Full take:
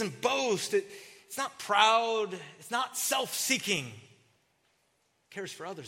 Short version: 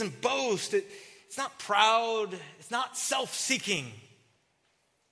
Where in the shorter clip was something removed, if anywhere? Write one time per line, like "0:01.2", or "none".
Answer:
none